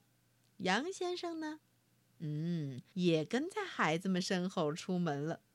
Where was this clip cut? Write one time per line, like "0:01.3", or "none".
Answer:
0:02.9